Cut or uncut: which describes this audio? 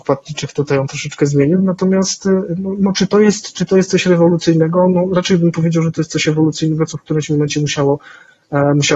uncut